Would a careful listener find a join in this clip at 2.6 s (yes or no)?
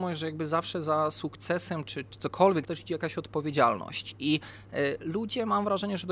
yes